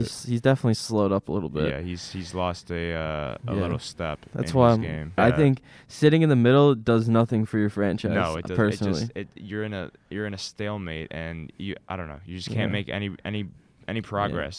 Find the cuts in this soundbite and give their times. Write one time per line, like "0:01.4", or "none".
0:05.2